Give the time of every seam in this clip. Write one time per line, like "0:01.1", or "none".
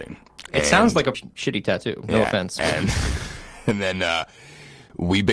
0:01.1